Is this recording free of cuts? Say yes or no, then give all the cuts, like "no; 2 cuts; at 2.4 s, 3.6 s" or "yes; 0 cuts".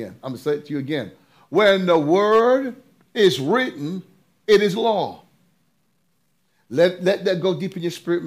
yes; 0 cuts